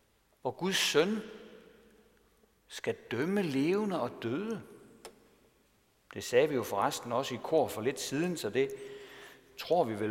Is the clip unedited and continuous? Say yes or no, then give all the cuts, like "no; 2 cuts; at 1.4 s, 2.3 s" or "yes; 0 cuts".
yes; 0 cuts